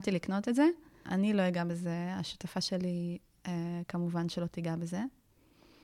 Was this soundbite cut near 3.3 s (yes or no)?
no